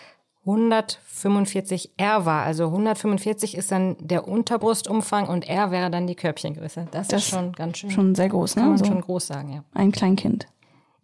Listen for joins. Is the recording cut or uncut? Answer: uncut